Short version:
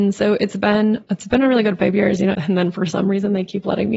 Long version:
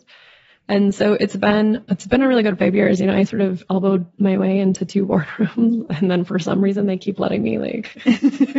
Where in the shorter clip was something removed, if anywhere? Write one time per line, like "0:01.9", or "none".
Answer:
0:02.3